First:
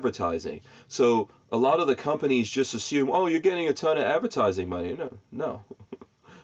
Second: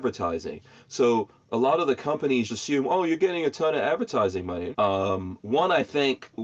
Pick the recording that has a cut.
second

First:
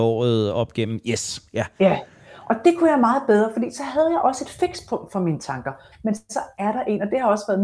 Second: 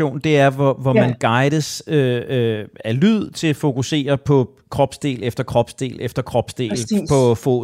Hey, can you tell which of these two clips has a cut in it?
first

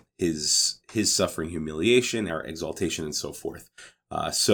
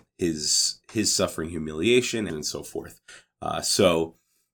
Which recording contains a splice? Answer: second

